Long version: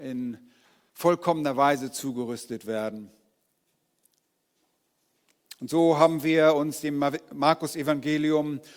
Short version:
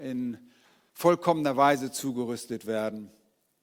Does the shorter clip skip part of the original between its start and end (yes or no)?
no